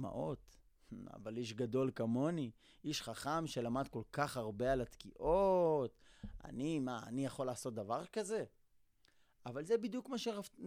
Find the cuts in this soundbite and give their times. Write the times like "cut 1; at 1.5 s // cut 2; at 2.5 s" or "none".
none